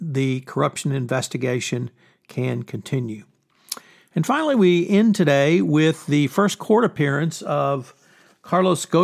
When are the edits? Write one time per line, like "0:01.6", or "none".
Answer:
none